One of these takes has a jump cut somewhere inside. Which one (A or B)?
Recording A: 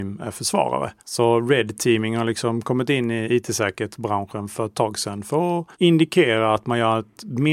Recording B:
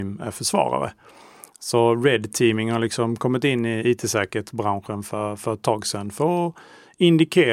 A